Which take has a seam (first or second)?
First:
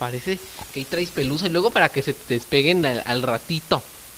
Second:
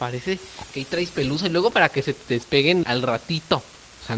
second